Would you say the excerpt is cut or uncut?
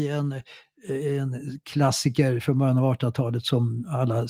uncut